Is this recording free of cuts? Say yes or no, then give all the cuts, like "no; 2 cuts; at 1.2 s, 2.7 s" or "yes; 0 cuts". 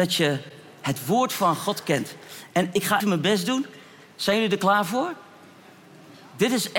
no; 1 cut; at 3.0 s